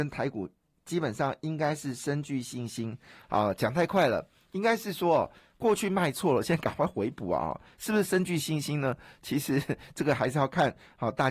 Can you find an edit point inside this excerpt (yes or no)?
no